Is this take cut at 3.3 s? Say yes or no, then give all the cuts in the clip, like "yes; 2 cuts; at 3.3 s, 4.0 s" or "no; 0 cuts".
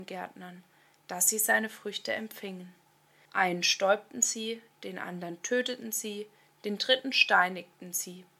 yes; 1 cut; at 3.3 s